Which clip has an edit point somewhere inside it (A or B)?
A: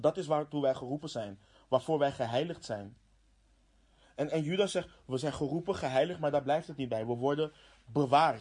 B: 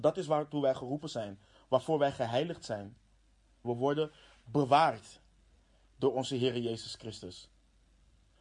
B